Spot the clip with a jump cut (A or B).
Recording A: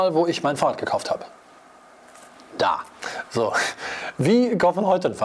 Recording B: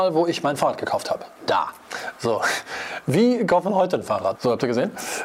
B